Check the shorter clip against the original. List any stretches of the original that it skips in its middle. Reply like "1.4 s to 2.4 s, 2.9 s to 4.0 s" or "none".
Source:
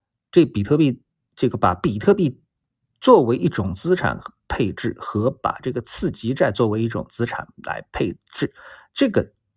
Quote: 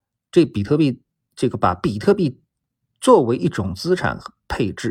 none